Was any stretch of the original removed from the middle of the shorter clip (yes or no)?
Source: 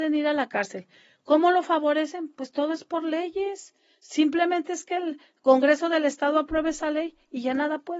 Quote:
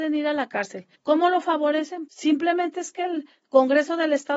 yes